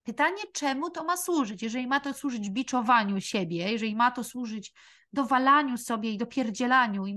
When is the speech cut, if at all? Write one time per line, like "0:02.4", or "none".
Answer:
none